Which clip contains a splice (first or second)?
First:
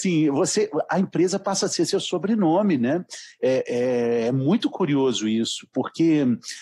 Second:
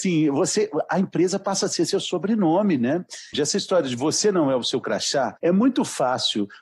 second